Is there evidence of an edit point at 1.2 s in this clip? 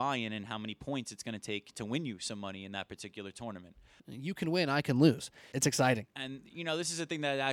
no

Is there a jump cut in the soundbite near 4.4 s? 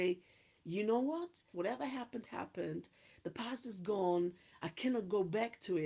no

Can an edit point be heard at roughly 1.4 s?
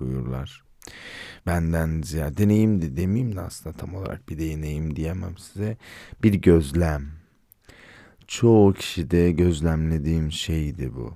yes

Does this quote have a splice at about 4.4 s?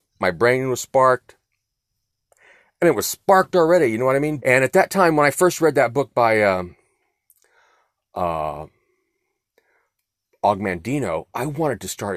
yes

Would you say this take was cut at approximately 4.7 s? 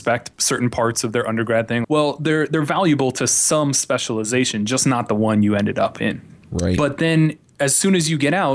no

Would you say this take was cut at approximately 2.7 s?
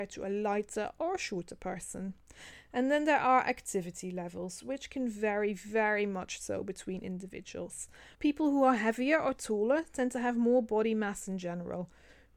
no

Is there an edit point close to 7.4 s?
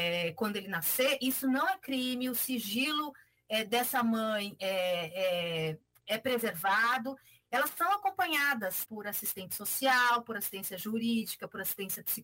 yes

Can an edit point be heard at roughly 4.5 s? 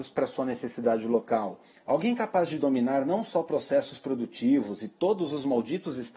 no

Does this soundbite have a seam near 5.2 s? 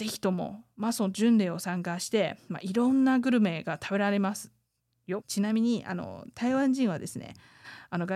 yes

